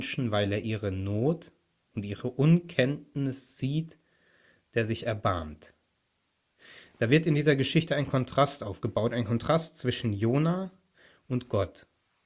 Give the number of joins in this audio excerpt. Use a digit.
0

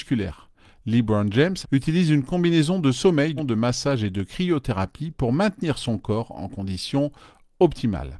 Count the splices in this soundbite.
2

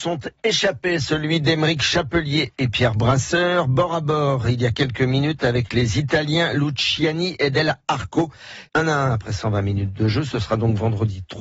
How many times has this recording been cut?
1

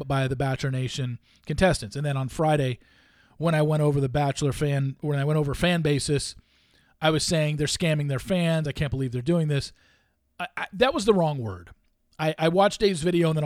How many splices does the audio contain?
0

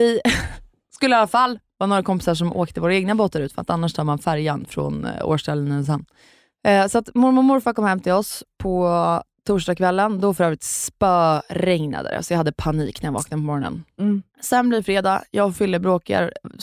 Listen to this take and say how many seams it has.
0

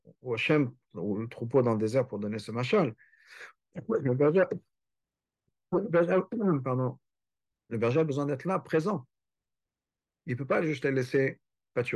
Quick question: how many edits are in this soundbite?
0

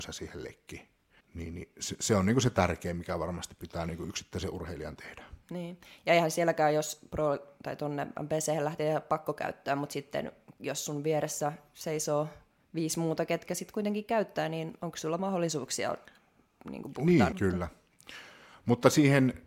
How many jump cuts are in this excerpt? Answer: 2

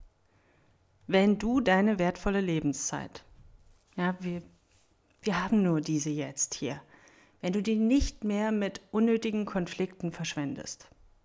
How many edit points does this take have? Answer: 0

